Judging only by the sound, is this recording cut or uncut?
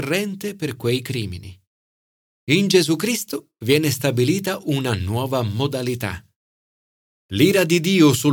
cut